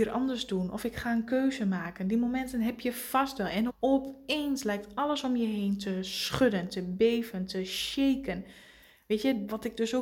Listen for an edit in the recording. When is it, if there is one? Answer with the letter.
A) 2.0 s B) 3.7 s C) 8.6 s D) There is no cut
B